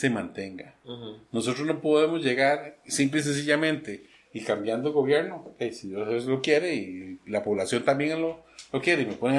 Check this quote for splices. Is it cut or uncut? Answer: uncut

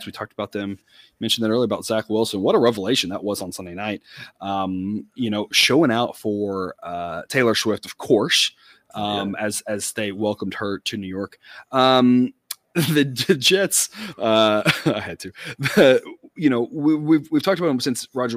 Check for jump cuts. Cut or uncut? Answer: uncut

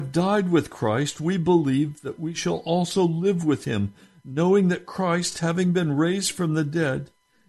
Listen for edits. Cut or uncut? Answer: uncut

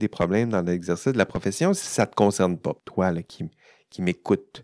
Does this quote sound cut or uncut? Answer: cut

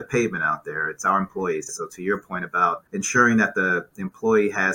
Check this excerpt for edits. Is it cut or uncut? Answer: cut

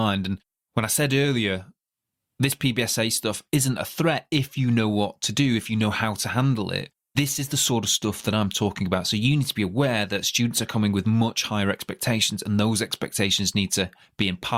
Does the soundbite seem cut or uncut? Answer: uncut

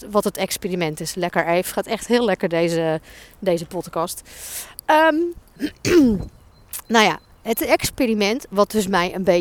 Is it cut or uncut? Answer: uncut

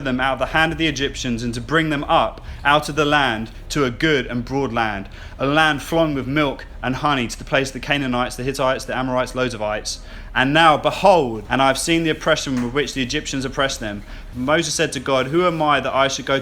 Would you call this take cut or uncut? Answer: cut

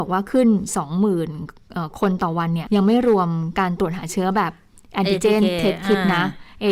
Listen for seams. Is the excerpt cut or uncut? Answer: cut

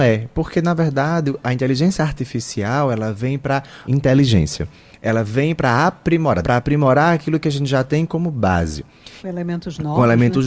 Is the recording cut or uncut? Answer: cut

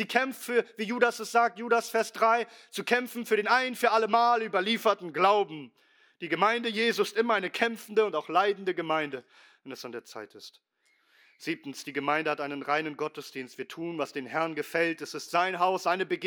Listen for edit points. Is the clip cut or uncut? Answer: uncut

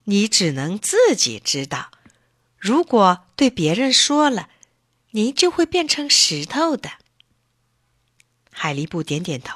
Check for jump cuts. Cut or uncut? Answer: uncut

